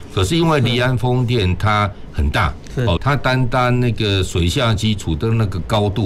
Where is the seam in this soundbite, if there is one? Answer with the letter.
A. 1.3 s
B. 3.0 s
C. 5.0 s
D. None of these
B